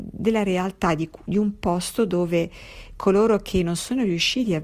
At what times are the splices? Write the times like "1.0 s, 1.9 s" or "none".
none